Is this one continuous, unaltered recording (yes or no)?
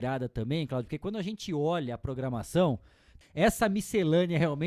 no